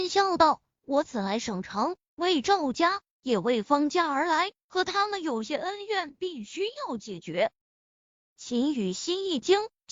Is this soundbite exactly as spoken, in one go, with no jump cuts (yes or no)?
no